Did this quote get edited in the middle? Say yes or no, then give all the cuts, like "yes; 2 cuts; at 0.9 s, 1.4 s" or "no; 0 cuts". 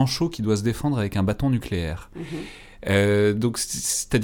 no; 0 cuts